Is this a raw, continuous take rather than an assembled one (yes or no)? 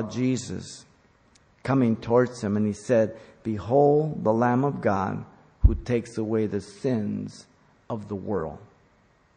yes